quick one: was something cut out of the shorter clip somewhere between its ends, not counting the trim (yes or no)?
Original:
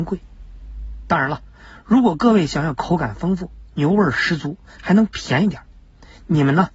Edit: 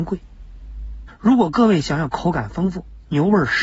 yes